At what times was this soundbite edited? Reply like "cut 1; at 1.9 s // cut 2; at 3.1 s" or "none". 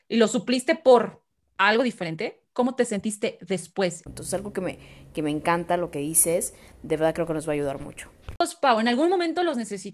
cut 1; at 4.1 s

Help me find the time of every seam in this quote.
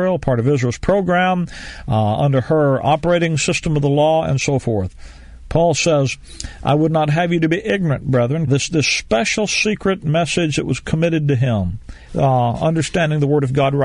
cut 1; at 8.5 s // cut 2; at 12.1 s

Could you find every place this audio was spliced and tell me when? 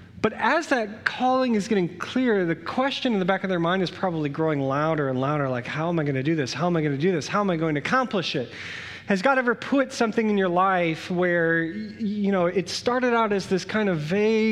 none

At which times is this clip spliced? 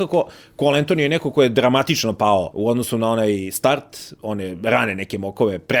cut 1; at 2.5 s

